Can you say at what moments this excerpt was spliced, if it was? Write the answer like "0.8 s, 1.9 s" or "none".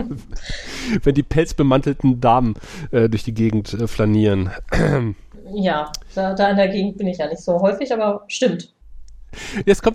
none